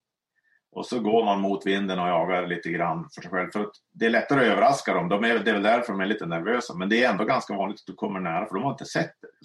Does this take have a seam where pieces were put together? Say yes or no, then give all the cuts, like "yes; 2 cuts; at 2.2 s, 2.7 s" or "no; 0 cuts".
no; 0 cuts